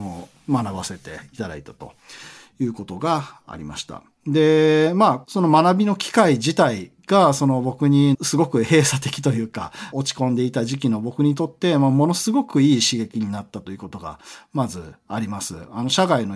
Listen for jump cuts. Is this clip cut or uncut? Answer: uncut